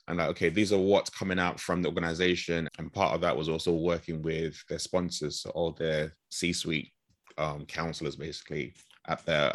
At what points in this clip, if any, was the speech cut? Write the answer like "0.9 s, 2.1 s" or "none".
2.7 s

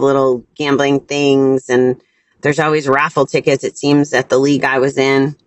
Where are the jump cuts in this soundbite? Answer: none

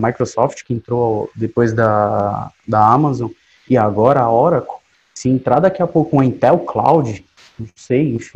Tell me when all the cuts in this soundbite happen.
none

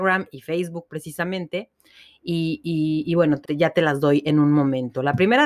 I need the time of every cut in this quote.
3.4 s

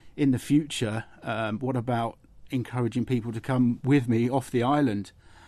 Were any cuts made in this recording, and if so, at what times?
none

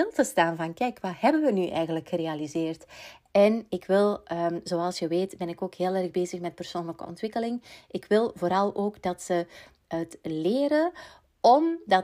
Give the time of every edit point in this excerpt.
3.3 s

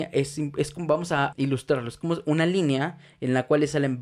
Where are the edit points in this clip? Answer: 1.3 s

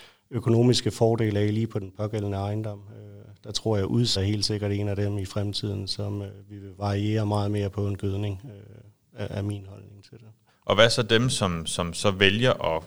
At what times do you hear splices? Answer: 4.2 s, 10.5 s

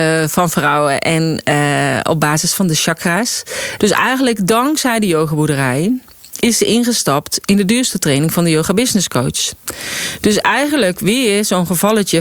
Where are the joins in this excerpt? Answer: 3.8 s

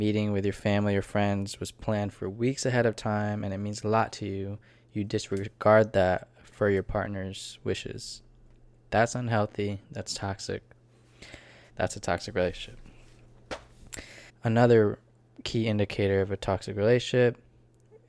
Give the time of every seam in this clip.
11.7 s, 14.3 s

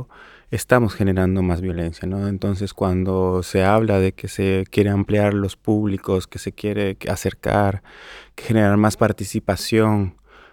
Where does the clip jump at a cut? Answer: none

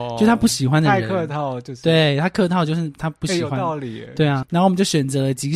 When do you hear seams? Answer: 4.4 s

